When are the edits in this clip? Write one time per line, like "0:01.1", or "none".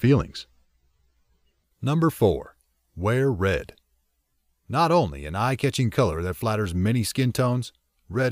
0:04.6